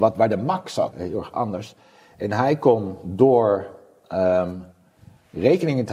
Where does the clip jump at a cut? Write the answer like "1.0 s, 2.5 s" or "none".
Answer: 0.9 s